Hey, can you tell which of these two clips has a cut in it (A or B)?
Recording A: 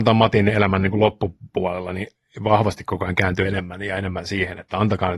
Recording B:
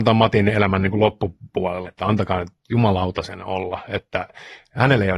B